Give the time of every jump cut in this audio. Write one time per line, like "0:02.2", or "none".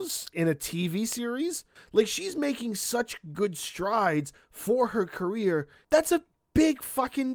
0:01.8
0:05.8